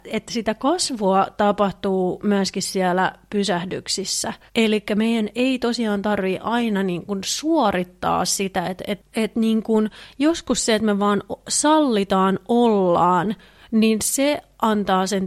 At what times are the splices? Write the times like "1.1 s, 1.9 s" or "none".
4.5 s